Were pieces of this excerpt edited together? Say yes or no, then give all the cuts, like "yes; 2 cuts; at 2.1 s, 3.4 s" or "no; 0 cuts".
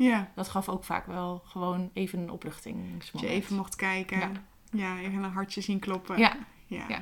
no; 0 cuts